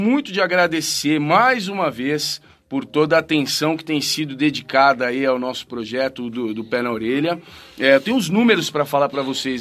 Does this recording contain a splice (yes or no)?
no